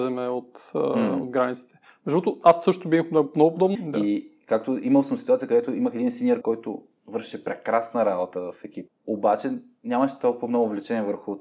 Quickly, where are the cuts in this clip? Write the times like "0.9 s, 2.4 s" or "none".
3.7 s, 6.4 s, 8.9 s